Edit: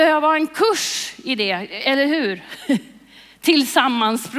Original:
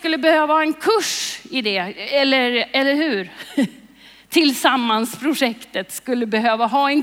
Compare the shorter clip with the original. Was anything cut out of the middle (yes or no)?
yes